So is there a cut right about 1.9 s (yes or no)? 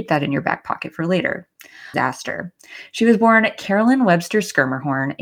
yes